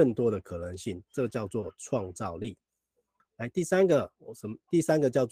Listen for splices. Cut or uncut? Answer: uncut